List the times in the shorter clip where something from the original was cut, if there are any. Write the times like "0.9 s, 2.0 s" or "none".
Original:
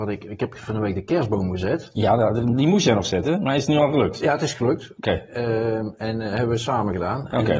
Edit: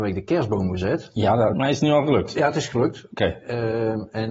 1.5 s